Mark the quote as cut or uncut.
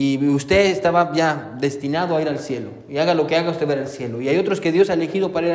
uncut